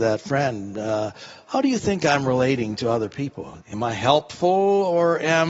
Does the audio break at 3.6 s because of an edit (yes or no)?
yes